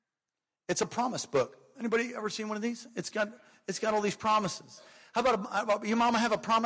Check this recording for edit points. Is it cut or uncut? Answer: uncut